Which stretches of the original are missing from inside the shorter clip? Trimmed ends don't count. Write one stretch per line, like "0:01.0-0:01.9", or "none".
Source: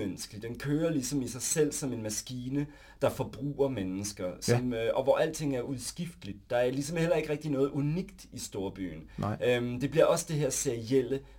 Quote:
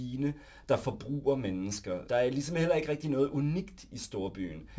0:04.4-0:06.5